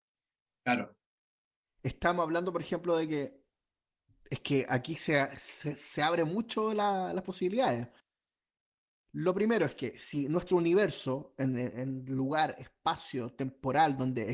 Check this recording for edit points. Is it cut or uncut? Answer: uncut